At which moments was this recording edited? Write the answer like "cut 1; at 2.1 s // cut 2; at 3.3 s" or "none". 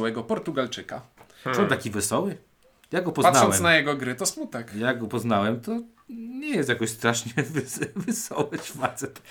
none